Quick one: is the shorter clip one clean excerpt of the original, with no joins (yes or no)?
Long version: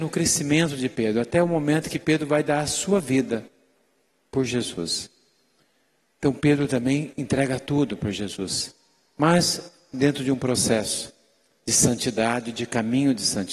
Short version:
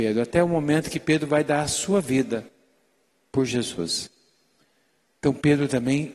yes